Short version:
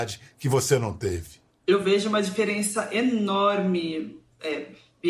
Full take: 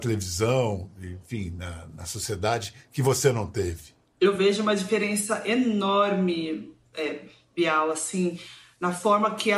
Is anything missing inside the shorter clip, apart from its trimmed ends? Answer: no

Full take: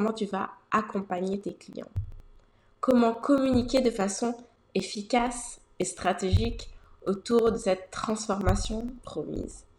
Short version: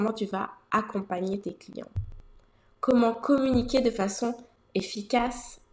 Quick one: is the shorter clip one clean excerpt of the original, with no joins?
yes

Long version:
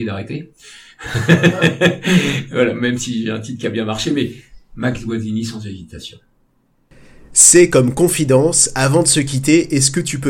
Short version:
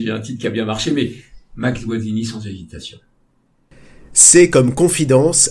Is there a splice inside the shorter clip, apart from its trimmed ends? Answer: no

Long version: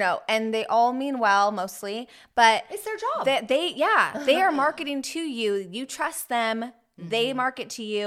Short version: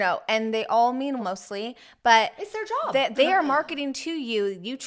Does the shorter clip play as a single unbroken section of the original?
no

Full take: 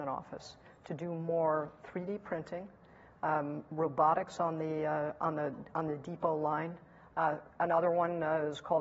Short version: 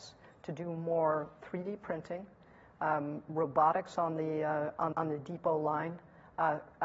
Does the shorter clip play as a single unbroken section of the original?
no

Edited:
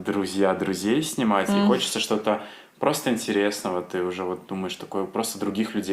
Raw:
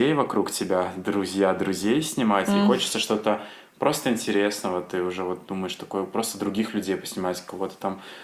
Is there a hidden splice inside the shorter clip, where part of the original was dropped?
no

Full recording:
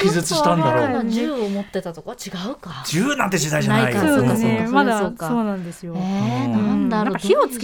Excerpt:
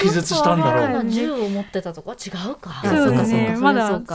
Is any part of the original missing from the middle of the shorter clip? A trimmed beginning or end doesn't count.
yes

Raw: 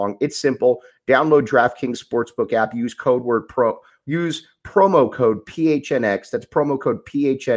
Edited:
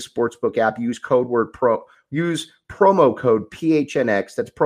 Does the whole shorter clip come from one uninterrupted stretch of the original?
yes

